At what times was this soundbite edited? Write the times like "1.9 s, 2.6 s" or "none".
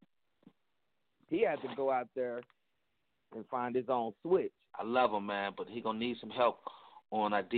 1.1 s, 4.7 s